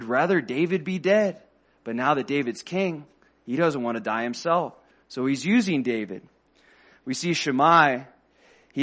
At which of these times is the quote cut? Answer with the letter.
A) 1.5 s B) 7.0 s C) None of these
C